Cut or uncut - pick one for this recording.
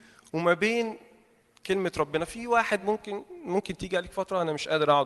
uncut